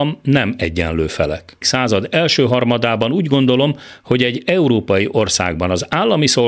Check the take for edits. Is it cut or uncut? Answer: cut